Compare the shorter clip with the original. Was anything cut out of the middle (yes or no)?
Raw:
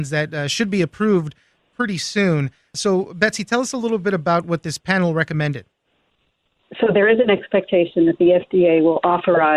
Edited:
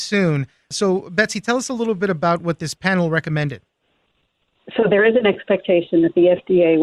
no